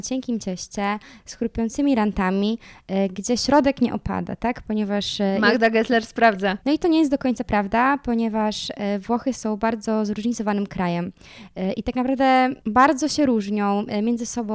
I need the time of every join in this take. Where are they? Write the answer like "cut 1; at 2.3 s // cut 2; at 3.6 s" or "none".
cut 1; at 6.6 s // cut 2; at 12.6 s